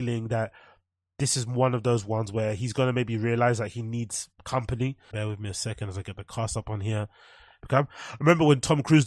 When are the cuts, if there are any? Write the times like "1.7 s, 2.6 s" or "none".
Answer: 5.1 s